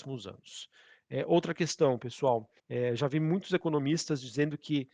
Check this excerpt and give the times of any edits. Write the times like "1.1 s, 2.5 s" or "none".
2.6 s